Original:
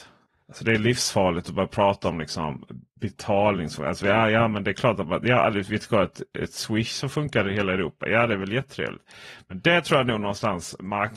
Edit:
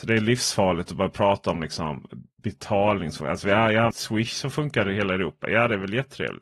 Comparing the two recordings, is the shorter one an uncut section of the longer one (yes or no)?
no